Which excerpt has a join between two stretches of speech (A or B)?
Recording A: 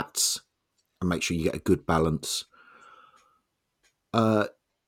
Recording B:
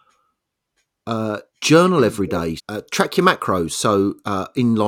B